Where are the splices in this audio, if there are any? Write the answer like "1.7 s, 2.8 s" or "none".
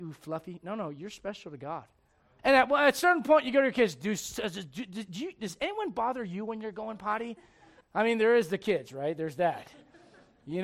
2.4 s, 7.8 s

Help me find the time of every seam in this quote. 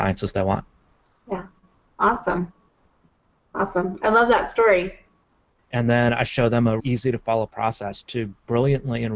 5.6 s, 6.8 s, 8.0 s

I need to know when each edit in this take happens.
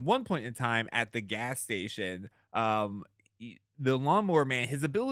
none

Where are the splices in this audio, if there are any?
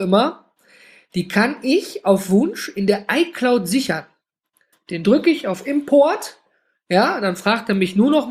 4.7 s

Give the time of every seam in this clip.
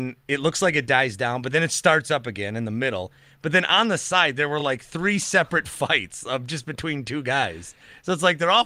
none

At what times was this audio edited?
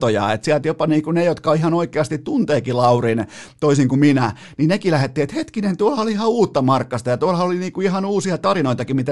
none

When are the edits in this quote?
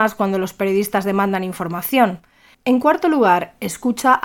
2.5 s

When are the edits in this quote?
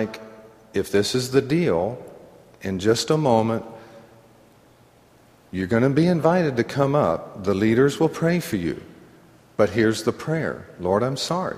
none

